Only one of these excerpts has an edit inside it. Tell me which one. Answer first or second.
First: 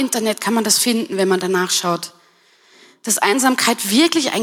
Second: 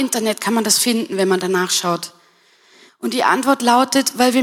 second